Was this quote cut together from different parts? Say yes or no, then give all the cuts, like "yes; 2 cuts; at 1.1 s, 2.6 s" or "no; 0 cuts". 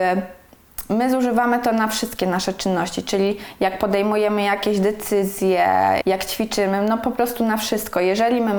yes; 1 cut; at 6.0 s